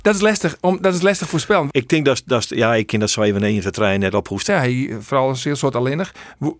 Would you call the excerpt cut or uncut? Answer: cut